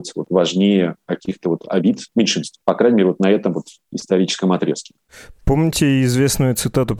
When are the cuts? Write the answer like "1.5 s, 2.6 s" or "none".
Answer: none